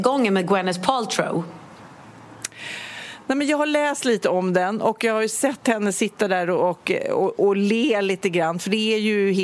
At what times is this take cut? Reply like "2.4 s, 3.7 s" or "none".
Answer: none